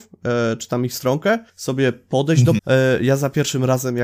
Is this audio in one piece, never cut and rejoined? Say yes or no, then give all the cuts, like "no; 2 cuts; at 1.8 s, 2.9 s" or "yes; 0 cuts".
no; 2 cuts; at 1.5 s, 2.6 s